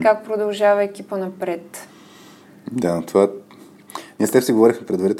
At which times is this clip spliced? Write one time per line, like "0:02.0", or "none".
none